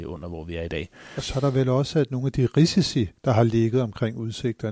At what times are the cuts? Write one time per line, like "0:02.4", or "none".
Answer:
0:03.2